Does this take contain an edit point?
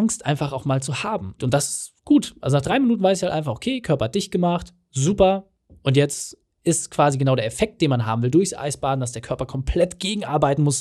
yes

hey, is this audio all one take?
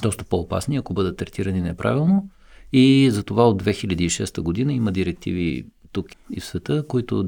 yes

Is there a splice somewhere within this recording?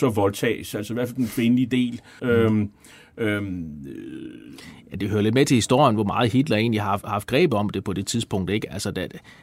yes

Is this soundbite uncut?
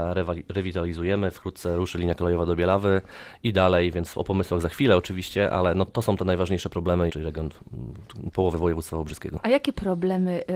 no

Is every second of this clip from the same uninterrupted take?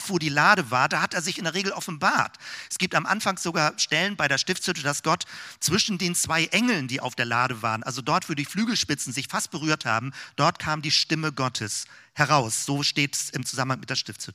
yes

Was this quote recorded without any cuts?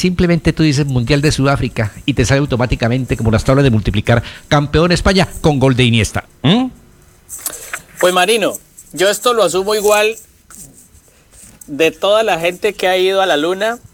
no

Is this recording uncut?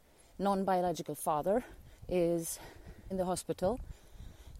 no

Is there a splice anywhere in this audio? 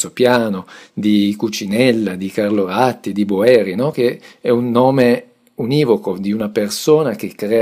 no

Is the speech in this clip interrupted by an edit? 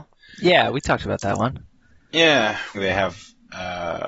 yes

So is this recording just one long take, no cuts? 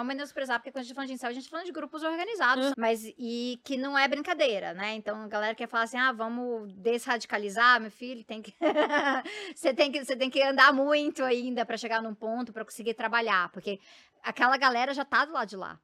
no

